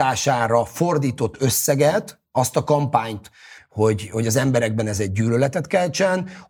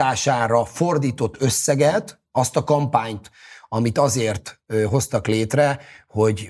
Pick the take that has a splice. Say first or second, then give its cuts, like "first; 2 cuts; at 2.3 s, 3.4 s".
first; 1 cut; at 3.6 s